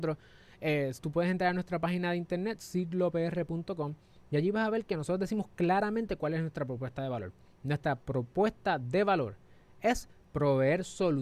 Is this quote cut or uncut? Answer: uncut